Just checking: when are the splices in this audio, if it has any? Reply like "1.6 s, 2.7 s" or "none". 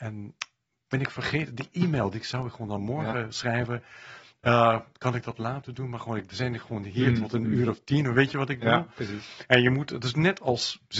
none